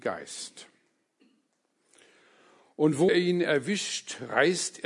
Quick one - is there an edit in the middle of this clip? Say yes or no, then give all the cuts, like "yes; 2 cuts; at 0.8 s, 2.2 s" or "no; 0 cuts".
yes; 1 cut; at 3.1 s